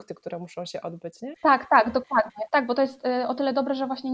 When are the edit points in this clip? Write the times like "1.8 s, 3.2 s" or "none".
1.3 s, 2.5 s